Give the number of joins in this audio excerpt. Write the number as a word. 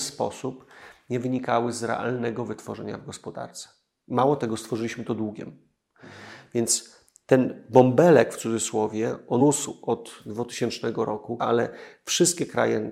two